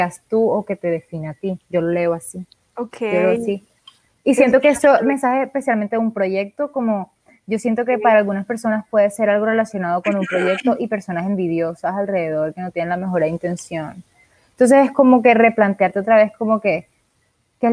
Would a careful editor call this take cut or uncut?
uncut